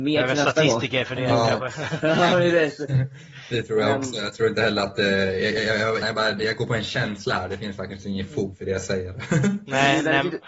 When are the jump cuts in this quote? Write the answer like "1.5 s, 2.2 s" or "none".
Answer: 6.0 s